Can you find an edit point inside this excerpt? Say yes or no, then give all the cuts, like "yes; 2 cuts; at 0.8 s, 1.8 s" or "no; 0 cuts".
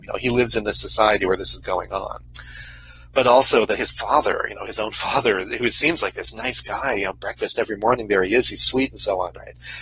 no; 0 cuts